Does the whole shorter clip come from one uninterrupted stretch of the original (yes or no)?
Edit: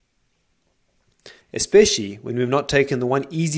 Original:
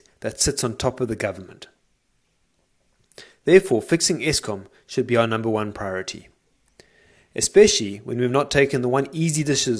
no